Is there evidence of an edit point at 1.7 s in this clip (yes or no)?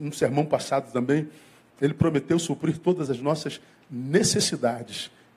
yes